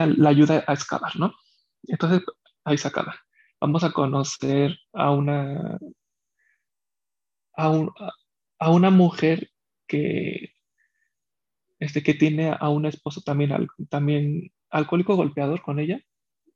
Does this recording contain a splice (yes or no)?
no